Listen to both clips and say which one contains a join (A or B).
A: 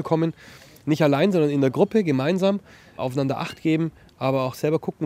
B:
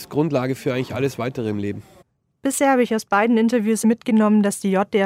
B